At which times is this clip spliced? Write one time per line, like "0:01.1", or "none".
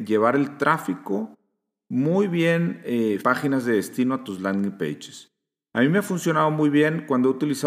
0:03.2

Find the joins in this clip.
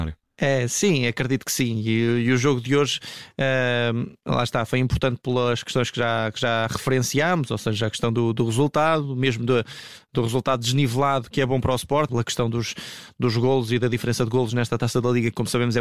0:12.1

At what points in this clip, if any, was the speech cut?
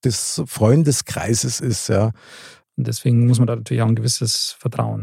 0:02.6

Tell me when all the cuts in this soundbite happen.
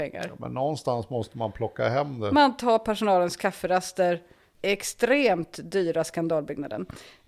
0:04.5

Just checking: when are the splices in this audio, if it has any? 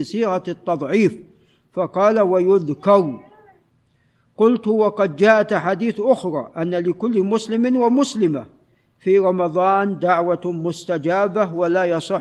none

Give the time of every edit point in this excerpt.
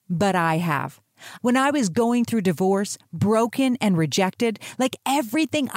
0:01.4

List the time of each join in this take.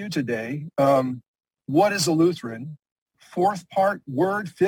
0:03.1

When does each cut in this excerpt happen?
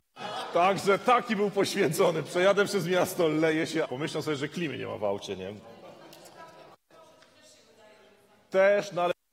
0:03.8

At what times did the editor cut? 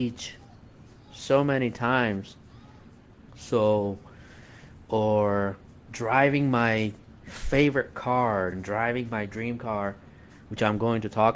0:03.3
0:08.5

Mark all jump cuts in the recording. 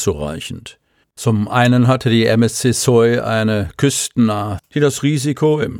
0:01.0
0:04.6

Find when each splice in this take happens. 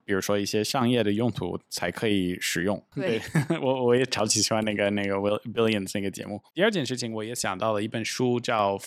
0:02.9
0:06.5

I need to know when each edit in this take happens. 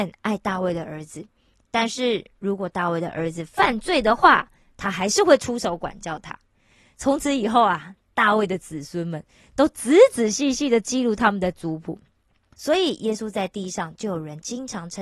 0:12.5

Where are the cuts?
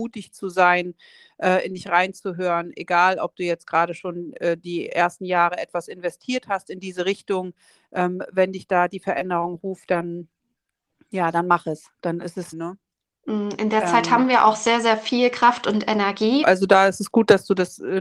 0:12.5
0:16.4

